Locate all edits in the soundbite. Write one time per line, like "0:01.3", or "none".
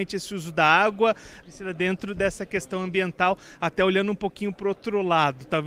0:01.4